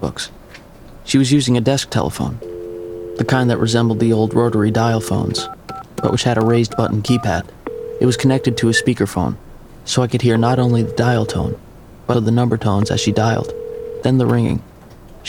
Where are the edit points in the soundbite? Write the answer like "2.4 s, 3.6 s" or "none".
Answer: 12.1 s